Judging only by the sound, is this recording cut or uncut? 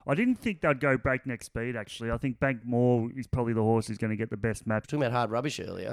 cut